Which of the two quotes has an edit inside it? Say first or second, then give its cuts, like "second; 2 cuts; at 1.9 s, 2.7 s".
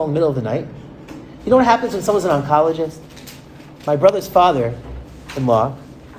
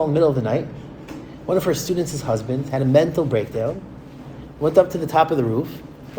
first; 1 cut; at 1.4 s